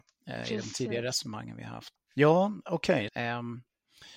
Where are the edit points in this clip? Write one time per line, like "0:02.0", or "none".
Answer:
0:02.0
0:03.1